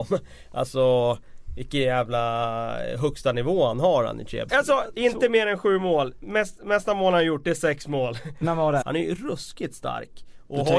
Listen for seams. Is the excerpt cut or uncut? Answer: cut